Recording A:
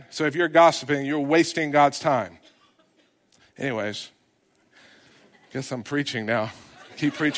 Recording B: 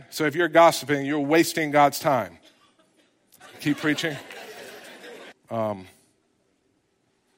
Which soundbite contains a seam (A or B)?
B